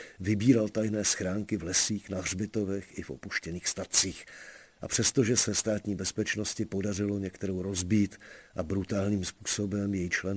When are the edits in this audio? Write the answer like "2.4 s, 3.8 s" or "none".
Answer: 4.7 s